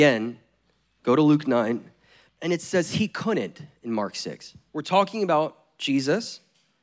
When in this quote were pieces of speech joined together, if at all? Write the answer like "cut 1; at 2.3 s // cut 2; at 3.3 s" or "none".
cut 1; at 2.3 s // cut 2; at 4.7 s